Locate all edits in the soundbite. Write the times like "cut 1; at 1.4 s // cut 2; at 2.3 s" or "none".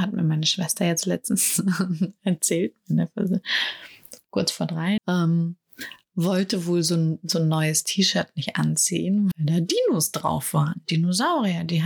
cut 1; at 5.0 s // cut 2; at 9.3 s

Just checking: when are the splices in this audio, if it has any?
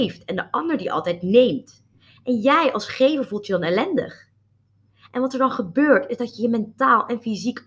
none

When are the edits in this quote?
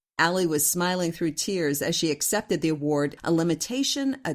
cut 1; at 3.2 s

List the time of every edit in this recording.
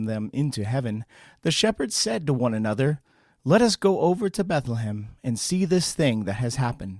none

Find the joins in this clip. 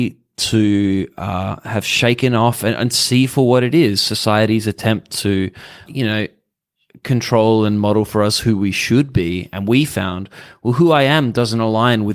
cut 1; at 5.9 s

